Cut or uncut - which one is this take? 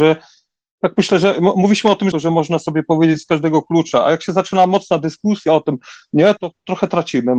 cut